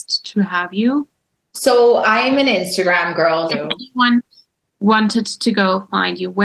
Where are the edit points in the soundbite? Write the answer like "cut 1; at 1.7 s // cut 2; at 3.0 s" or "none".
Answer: cut 1; at 1.5 s // cut 2; at 3.5 s